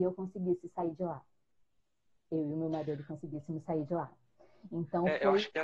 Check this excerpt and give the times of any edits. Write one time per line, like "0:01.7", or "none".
none